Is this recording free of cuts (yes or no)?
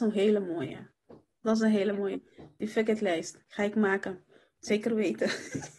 yes